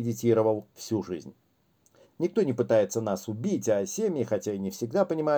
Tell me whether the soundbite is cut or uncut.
cut